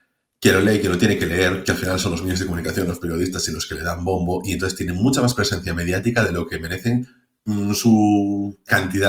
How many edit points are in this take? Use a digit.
0